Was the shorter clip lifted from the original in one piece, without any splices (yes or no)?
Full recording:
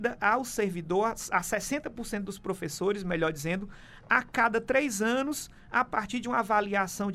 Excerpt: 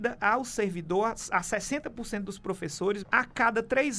no